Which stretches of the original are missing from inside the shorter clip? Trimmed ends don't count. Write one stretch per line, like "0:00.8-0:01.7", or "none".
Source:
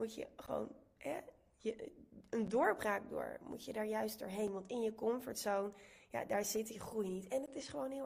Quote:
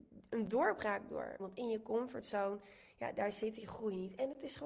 0:03.4-0:04.5